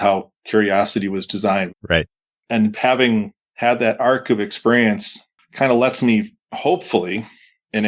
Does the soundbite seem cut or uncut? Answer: cut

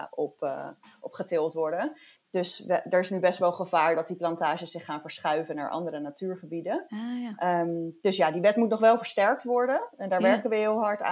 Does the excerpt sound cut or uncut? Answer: cut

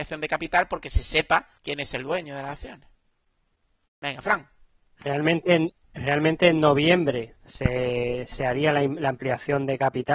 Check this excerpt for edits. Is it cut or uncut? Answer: cut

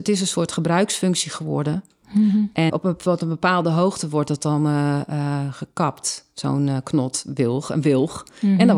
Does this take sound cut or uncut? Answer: cut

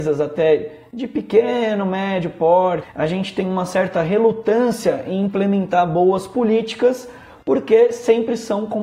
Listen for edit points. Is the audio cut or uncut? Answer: cut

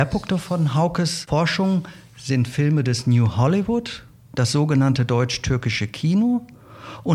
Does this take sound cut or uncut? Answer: uncut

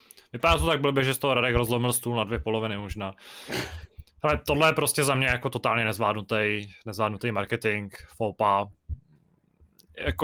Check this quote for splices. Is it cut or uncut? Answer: uncut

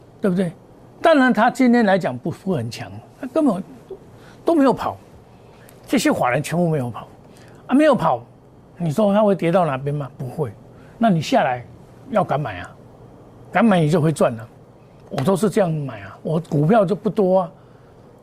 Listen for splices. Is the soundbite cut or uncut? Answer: uncut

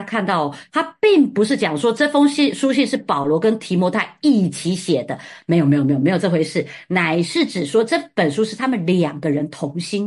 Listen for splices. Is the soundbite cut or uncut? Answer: uncut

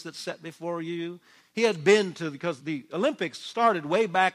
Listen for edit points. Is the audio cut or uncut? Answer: cut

